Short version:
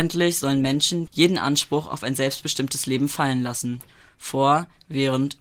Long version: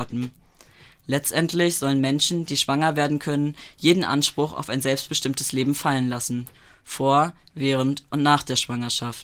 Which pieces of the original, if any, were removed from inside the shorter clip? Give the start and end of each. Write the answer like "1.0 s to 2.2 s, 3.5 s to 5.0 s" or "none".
2.5 s to 3.7 s